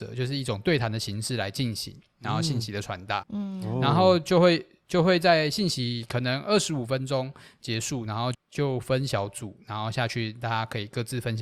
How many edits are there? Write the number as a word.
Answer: two